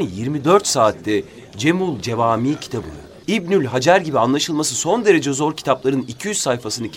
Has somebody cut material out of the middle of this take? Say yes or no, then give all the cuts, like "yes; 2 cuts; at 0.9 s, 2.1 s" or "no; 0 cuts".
yes; 1 cut; at 3.2 s